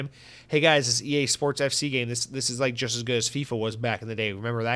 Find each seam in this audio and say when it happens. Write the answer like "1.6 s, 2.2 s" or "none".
none